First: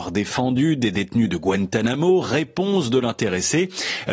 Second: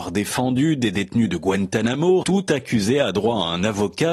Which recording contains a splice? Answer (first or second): second